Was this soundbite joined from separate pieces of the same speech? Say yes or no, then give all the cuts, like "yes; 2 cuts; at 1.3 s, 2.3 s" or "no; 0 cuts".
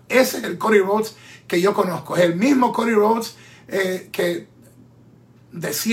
no; 0 cuts